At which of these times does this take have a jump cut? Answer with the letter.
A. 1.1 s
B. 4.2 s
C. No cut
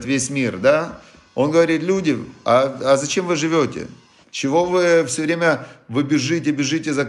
B